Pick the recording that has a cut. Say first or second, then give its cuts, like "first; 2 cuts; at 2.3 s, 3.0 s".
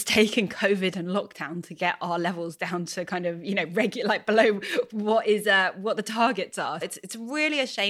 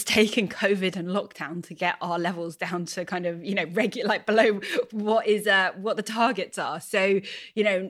first; 1 cut; at 6.8 s